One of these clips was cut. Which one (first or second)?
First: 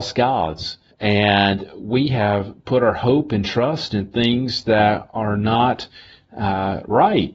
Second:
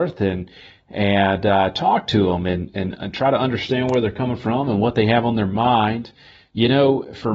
first